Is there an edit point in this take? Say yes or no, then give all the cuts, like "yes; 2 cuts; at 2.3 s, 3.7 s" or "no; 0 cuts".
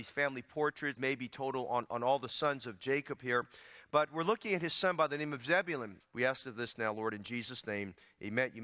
yes; 2 cuts; at 1.0 s, 6.0 s